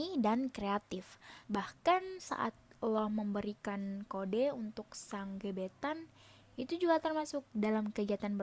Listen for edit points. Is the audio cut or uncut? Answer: cut